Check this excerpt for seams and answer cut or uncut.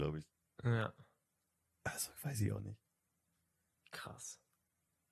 uncut